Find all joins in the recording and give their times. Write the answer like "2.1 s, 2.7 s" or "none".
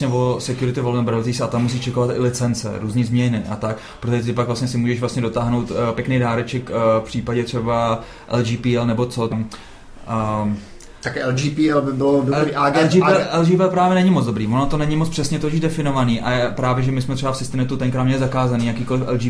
9.3 s